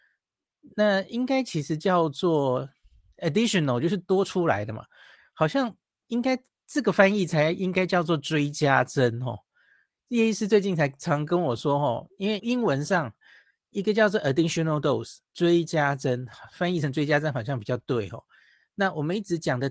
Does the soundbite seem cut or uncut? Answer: cut